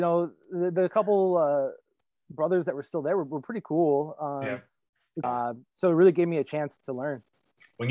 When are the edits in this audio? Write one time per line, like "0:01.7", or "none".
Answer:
0:05.2
0:06.8